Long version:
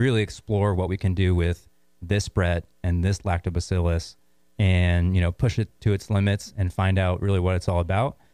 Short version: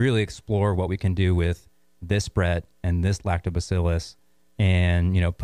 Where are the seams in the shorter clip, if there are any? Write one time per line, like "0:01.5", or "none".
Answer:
none